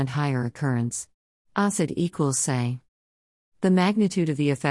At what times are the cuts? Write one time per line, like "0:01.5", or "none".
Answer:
0:01.3